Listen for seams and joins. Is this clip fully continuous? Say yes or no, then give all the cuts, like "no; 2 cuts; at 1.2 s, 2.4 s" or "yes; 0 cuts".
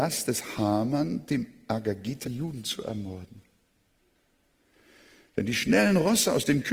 no; 1 cut; at 2.2 s